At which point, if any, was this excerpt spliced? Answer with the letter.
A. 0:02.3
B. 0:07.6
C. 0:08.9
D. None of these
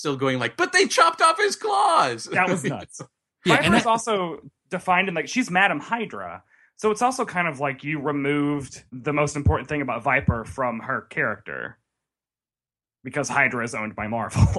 C